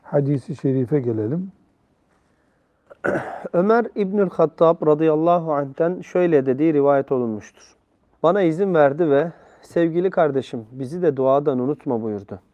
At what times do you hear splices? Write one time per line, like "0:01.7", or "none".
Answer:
0:08.2